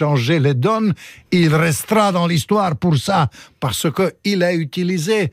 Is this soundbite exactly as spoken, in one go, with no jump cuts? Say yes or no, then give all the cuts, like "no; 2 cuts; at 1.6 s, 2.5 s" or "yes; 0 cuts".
no; 1 cut; at 1.2 s